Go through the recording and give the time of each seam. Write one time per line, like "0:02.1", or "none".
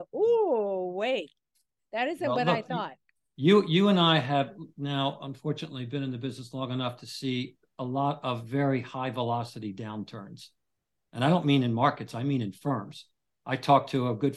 none

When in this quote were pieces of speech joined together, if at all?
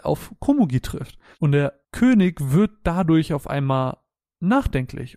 0:01.3

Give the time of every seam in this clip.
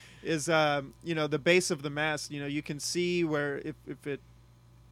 none

